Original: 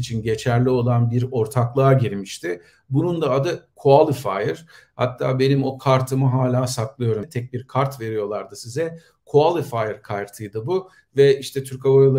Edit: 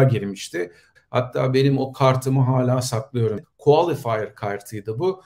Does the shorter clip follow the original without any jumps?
no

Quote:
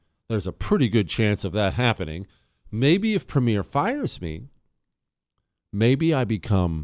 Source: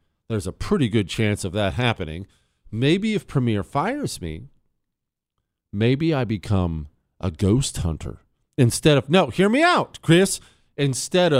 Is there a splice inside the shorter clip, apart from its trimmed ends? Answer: no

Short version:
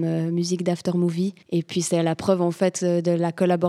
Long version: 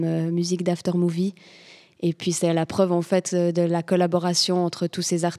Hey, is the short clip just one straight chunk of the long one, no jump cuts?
no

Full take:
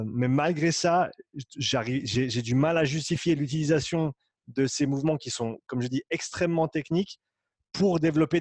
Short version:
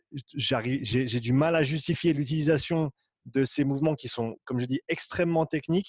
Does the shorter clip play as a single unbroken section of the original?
yes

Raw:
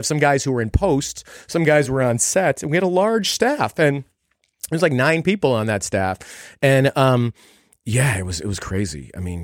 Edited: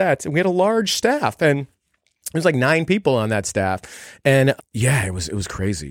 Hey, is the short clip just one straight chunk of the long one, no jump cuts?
no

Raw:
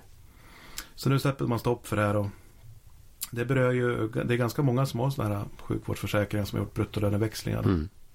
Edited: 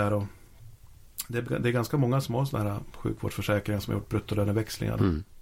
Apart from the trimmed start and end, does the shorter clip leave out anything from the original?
yes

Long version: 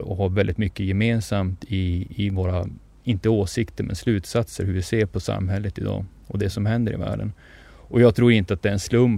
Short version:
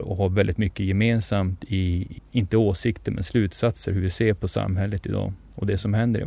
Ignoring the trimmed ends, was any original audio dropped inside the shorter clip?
yes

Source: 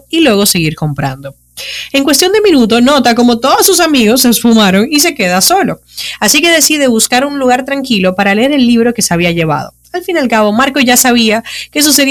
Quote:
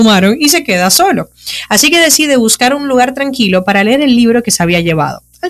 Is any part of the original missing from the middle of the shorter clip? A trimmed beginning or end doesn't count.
no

